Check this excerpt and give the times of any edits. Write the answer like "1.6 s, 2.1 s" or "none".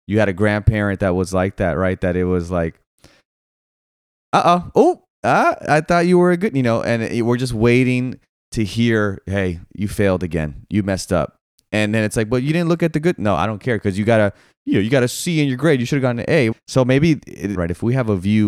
16.5 s, 17.5 s